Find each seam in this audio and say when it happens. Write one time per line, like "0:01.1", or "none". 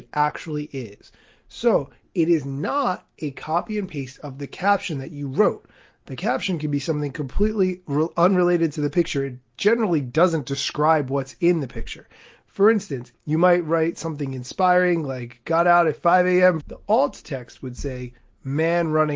0:13.1
0:16.6